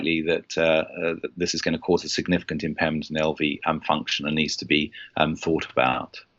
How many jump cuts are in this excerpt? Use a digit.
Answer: 0